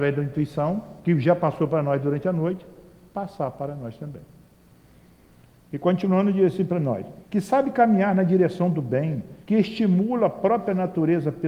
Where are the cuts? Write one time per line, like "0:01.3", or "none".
0:07.2
0:09.4